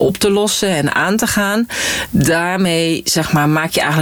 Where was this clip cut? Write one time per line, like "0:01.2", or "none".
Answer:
none